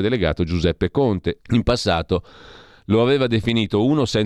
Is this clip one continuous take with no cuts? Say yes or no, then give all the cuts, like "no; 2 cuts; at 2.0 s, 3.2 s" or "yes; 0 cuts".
no; 1 cut; at 1.4 s